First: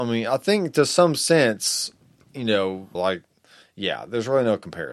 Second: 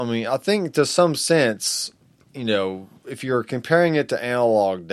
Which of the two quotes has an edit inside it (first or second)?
first